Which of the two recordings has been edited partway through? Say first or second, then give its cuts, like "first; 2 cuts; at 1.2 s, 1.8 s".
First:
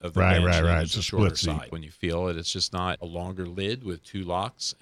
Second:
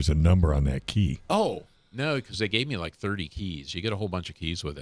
first; 2 cuts; at 1.7 s, 3.0 s